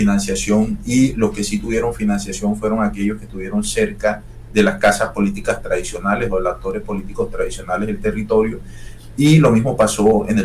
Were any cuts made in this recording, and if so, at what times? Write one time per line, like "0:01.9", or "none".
0:09.1